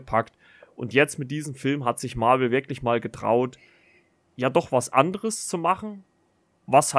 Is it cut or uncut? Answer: uncut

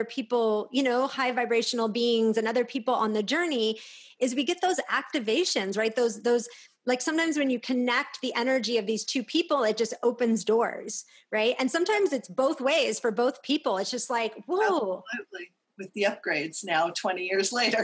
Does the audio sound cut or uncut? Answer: cut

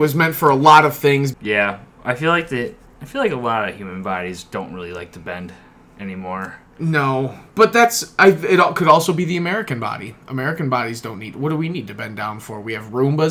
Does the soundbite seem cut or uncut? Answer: cut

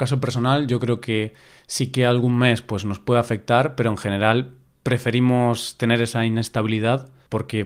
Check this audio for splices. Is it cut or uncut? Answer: uncut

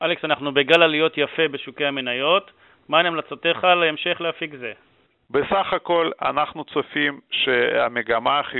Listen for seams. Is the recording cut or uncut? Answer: cut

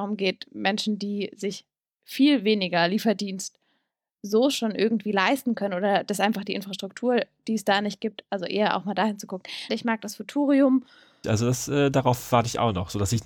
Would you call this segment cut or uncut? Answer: cut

